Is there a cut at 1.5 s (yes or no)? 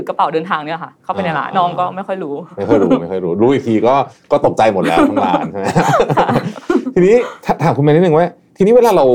yes